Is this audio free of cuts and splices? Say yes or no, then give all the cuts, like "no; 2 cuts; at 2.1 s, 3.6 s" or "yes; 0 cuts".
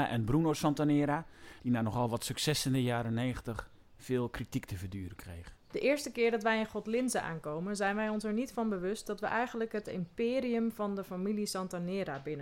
no; 2 cuts; at 1.6 s, 5.6 s